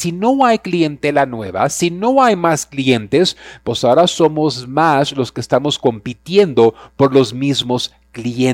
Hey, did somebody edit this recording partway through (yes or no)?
no